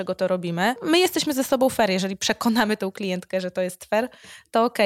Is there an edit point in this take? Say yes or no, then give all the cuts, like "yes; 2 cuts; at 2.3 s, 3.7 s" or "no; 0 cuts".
no; 0 cuts